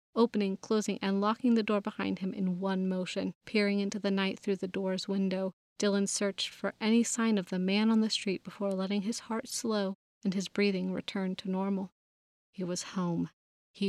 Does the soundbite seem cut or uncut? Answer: cut